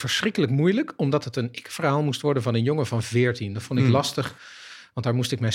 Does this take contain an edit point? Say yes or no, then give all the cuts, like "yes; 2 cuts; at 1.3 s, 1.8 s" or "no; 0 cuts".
no; 0 cuts